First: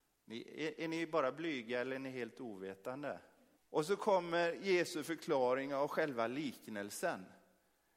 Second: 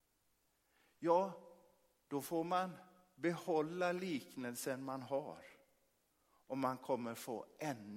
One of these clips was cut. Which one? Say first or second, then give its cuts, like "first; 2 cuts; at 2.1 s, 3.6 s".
first; 1 cut; at 3.6 s